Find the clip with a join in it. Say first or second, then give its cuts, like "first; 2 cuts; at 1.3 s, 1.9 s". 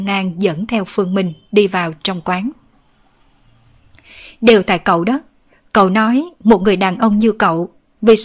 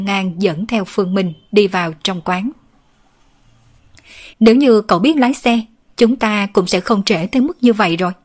second; 1 cut; at 4.3 s